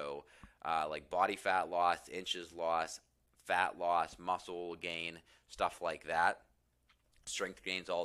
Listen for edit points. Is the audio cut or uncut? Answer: uncut